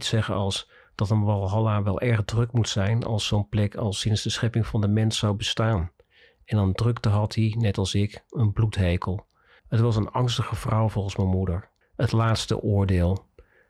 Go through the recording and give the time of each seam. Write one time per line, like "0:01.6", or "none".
0:09.6
0:11.8

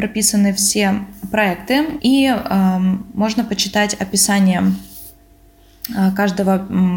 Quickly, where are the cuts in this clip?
0:02.0

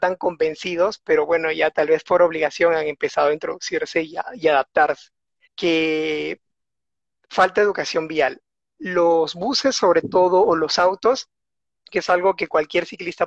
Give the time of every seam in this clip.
0:05.4

